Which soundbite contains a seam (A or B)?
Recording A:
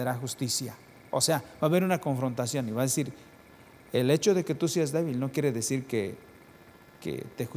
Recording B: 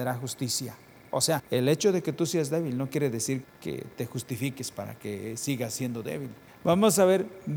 B